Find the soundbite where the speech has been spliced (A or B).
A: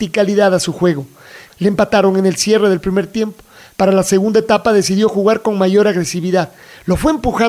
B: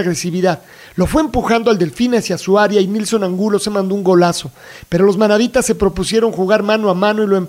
A